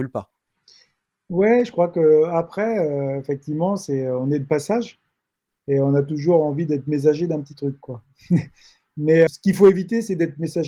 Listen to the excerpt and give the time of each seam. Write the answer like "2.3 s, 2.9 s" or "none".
9.3 s